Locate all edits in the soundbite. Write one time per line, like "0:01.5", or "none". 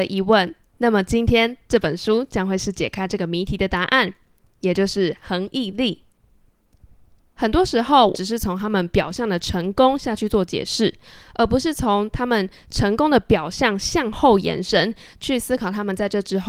0:08.1